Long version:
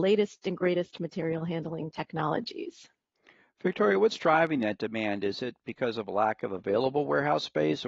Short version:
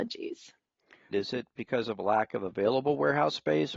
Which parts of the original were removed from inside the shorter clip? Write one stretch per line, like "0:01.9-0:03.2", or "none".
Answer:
0:03.5-0:05.2